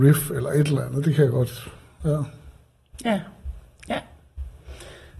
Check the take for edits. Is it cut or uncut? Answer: uncut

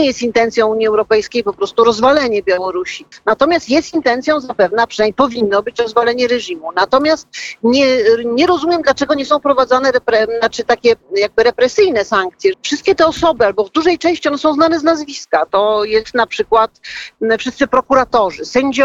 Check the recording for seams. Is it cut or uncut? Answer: cut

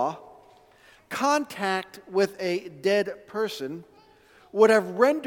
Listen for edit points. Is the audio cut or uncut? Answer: uncut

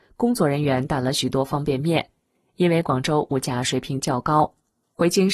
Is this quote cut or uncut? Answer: uncut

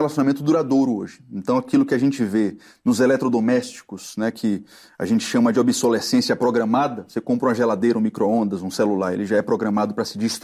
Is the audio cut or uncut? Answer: uncut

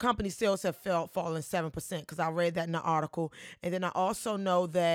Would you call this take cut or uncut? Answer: uncut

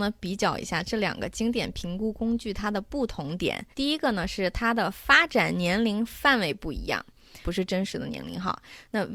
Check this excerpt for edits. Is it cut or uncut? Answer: cut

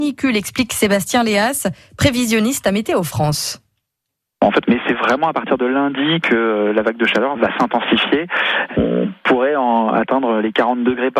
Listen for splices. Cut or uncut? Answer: cut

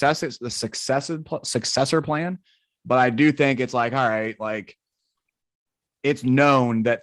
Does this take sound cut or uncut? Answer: uncut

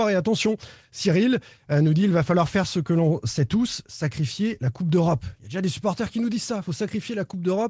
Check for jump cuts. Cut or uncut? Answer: uncut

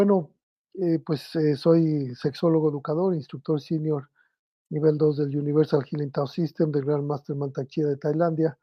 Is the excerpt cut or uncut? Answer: uncut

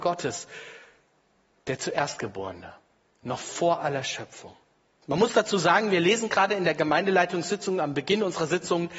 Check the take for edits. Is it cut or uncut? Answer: cut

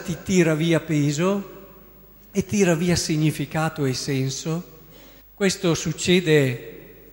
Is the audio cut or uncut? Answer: cut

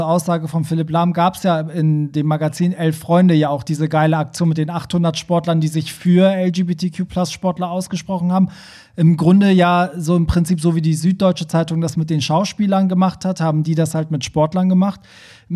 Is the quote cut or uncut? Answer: uncut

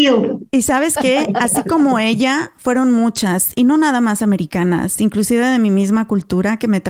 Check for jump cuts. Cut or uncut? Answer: uncut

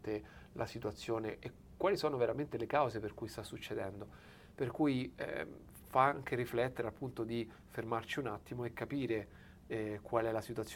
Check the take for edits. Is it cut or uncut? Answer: uncut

